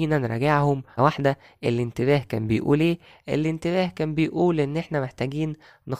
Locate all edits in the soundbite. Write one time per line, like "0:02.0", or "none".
0:01.0